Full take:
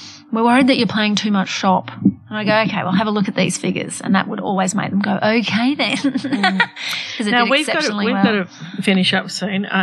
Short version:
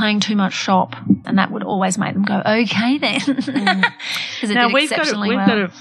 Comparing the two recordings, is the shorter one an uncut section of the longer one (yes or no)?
no